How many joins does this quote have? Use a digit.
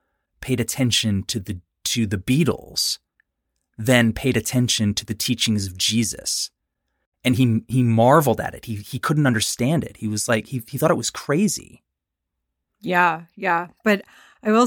0